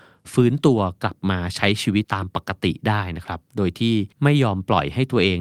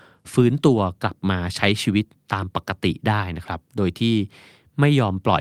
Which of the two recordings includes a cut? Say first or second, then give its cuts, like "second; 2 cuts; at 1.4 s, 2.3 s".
first; 2 cuts; at 2.0 s, 4.1 s